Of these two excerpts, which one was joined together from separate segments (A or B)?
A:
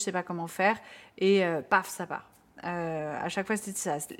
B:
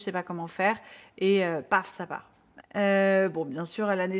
B